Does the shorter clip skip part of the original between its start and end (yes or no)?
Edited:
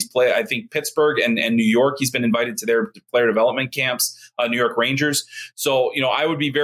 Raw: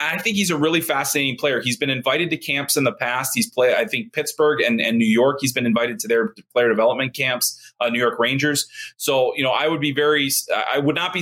no